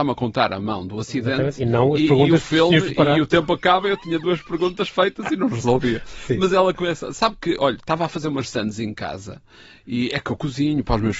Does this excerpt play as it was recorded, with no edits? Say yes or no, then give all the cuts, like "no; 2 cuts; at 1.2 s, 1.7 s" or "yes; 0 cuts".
yes; 0 cuts